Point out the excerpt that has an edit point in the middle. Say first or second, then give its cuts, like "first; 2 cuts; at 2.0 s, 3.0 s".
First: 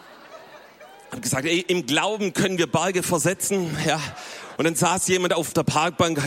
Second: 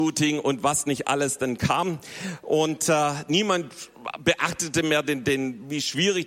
first; 1 cut; at 4.6 s